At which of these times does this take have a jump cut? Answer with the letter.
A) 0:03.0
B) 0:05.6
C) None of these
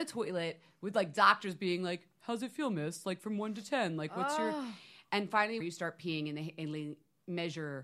B